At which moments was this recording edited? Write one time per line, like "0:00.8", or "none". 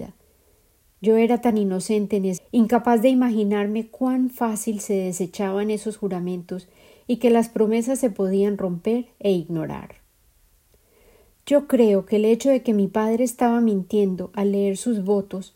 0:02.4